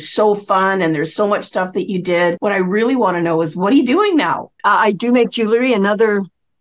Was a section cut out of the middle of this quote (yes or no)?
yes